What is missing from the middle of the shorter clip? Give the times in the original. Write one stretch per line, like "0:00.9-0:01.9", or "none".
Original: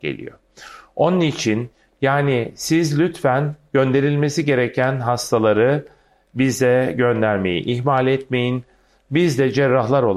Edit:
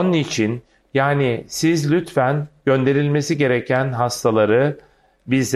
none